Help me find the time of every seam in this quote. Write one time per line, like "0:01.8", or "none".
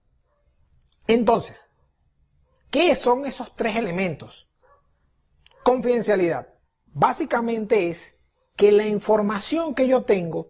none